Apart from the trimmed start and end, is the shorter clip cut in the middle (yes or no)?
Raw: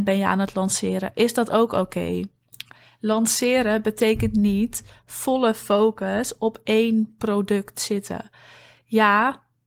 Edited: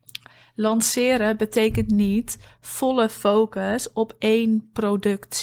no